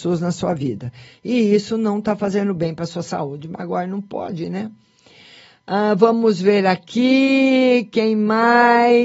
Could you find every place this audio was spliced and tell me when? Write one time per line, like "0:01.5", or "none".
none